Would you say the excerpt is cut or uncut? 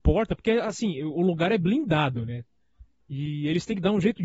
cut